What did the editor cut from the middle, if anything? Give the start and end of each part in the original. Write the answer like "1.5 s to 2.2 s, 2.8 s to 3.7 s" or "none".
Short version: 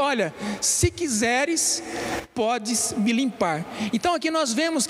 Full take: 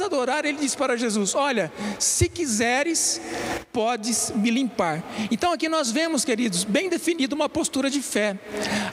none